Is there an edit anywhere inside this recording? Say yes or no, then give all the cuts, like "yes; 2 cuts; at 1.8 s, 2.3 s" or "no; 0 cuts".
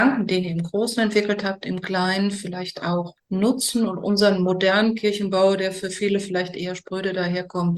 no; 0 cuts